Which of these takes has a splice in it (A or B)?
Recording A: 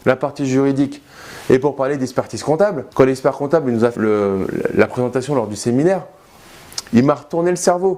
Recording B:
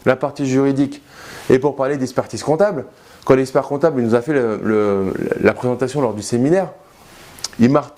A